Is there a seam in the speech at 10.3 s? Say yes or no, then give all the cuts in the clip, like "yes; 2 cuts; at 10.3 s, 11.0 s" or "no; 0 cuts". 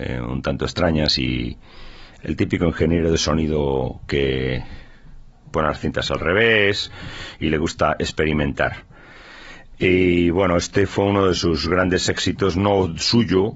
no; 0 cuts